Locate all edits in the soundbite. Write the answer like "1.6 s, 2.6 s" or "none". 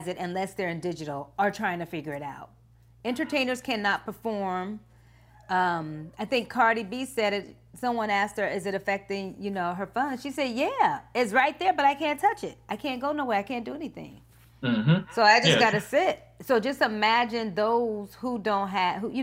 none